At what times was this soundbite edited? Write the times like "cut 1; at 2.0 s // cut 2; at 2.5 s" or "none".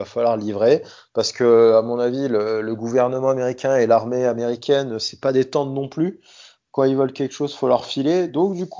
none